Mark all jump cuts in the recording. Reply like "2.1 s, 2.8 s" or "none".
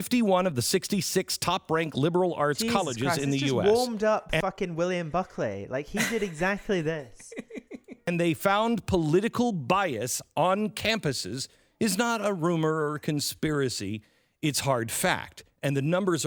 none